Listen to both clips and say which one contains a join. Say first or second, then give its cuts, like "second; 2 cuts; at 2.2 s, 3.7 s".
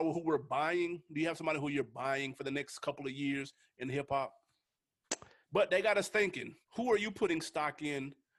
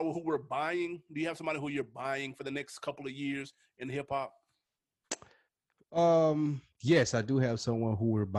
first; 2 cuts; at 5.4 s, 6.6 s